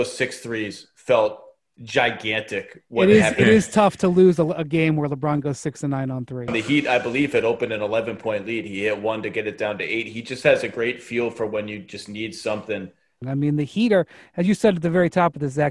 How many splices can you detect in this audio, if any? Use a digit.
2